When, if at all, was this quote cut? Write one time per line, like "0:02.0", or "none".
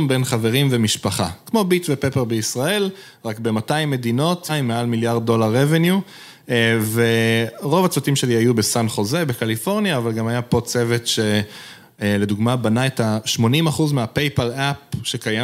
0:04.5